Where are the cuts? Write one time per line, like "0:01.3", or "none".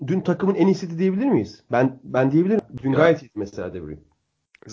none

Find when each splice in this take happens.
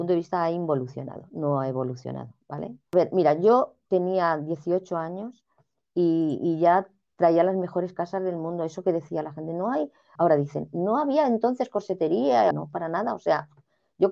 0:10.2
0:12.5

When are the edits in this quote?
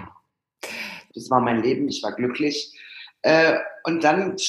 0:01.1

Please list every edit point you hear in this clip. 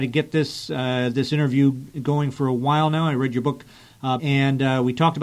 0:04.2

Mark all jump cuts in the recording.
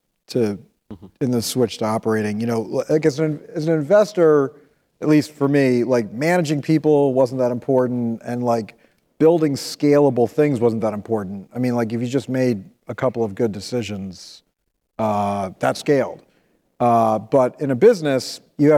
none

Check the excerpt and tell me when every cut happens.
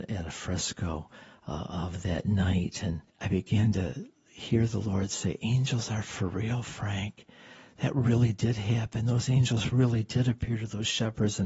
0:03.1

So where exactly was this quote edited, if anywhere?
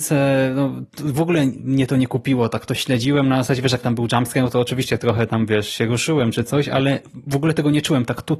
none

